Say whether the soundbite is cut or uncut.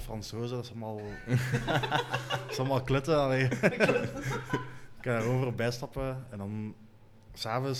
uncut